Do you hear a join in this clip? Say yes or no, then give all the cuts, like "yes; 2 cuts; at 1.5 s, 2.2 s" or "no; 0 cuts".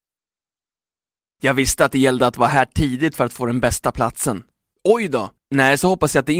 yes; 1 cut; at 4.7 s